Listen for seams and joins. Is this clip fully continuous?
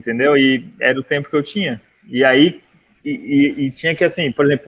yes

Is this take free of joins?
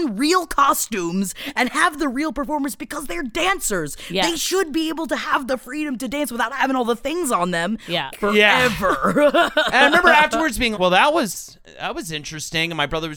no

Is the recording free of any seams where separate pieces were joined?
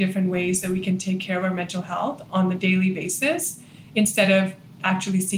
yes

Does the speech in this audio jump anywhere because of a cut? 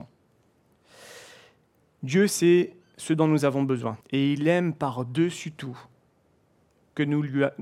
yes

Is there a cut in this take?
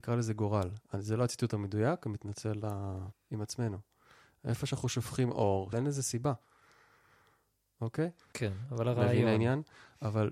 yes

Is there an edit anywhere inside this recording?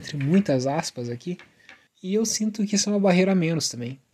yes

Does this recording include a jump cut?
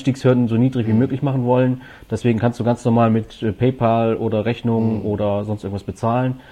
no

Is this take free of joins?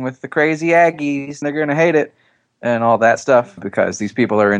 no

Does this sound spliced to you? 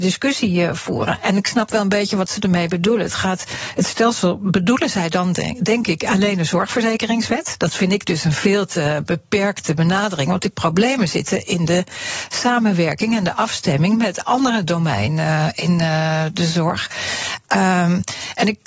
no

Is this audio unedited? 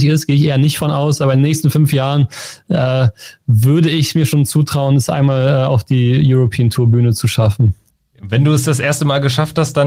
yes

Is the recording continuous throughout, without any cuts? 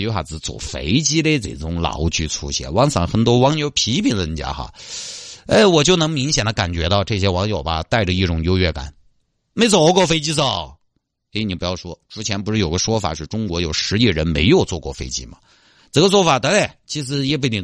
yes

